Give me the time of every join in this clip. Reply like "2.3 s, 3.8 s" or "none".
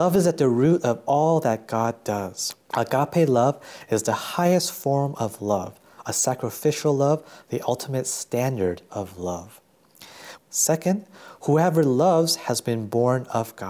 2.7 s, 10.4 s